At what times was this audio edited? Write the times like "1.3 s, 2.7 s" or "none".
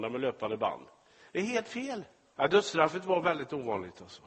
2.3 s